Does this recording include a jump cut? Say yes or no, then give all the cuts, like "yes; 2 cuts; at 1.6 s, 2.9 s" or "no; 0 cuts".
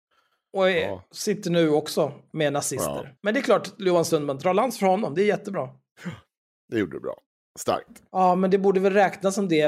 yes; 2 cuts; at 3.2 s, 8.1 s